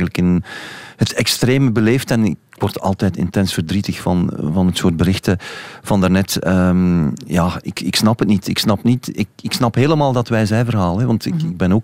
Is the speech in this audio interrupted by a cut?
no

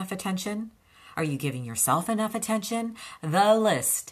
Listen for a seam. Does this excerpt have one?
no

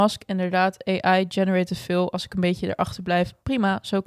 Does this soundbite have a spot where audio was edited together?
no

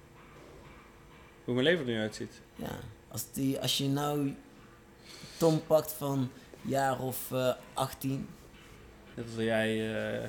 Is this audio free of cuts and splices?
no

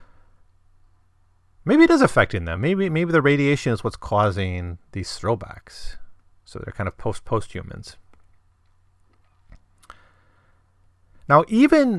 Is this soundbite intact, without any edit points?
yes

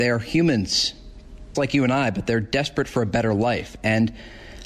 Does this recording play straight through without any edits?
no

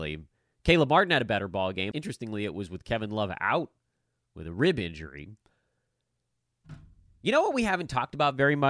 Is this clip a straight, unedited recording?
no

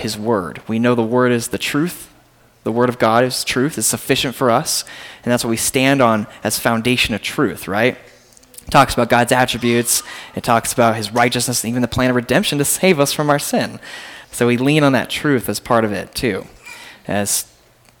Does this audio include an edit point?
no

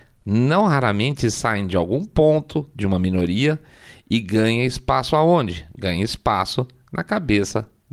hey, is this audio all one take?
yes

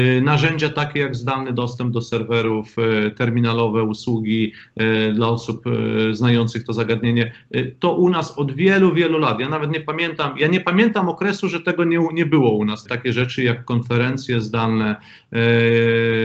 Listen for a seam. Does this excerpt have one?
yes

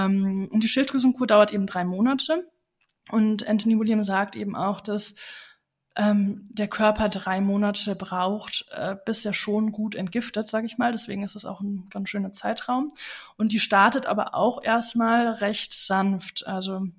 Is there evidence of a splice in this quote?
no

